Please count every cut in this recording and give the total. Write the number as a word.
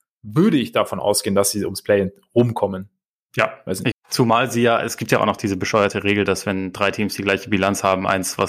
one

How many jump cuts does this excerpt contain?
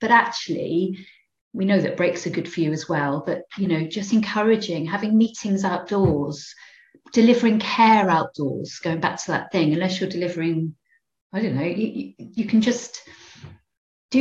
zero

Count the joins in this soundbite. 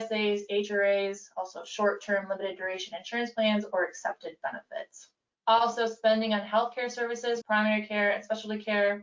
two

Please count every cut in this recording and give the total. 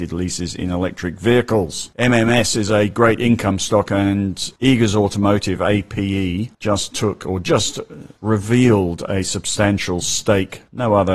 zero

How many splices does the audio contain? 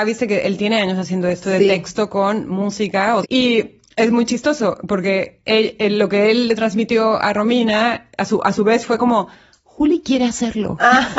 one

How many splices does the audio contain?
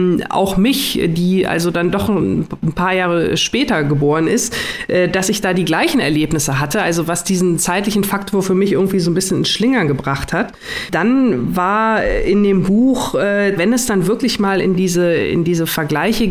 one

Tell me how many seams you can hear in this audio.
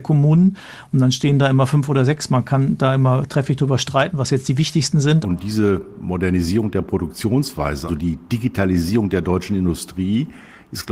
two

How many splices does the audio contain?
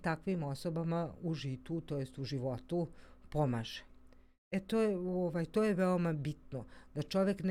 zero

